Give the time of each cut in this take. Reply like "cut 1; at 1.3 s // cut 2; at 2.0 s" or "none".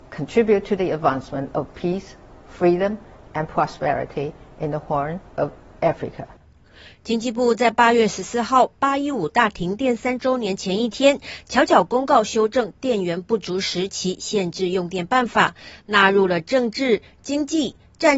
none